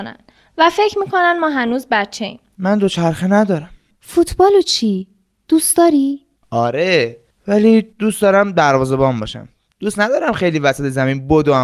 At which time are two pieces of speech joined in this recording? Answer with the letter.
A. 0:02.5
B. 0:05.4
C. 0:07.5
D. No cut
A